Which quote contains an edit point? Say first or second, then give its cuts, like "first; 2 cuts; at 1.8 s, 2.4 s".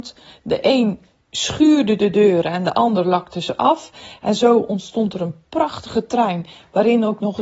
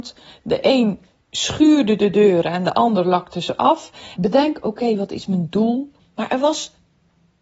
second; 2 cuts; at 4.1 s, 6.0 s